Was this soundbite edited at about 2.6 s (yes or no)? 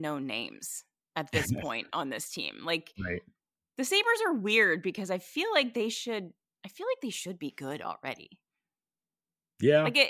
no